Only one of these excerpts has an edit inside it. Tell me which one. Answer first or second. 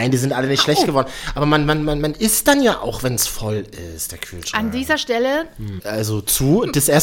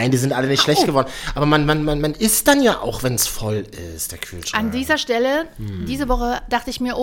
first